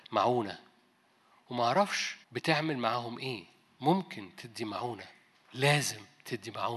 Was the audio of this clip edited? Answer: yes; 1 cut; at 2.2 s

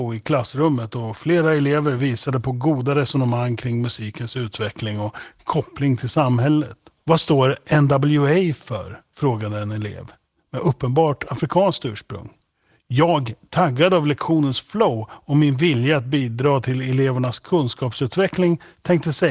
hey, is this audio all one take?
yes; 0 cuts

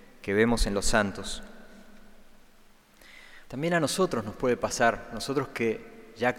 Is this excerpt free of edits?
no; 1 cut; at 3.5 s

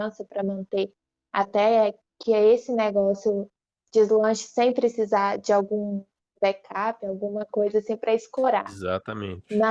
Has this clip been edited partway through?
no; 0 cuts

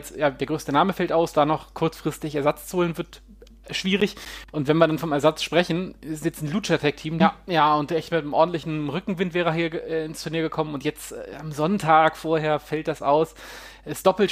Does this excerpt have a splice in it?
yes; 1 cut; at 7.2 s

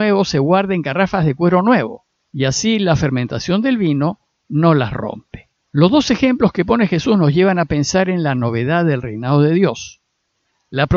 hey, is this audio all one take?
no; 2 cuts; at 2.2 s, 5.6 s

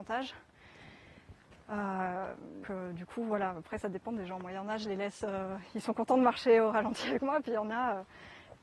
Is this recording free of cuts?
no; 1 cut; at 2.6 s

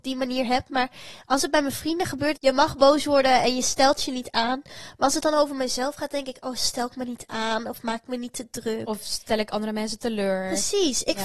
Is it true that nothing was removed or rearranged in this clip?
no; 1 cut; at 2.4 s

